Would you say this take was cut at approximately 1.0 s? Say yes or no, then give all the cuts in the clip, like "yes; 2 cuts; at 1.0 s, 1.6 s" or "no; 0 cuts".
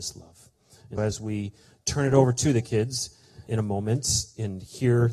yes; 2 cuts; at 1.0 s, 3.5 s